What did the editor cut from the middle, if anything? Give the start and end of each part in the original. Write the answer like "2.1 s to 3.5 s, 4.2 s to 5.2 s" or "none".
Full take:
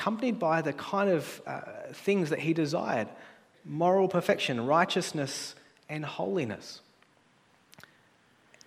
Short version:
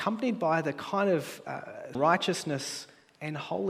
1.9 s to 4.6 s